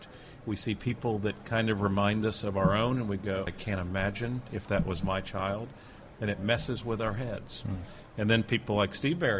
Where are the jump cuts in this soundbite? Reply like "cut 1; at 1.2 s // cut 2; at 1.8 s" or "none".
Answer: cut 1; at 3.5 s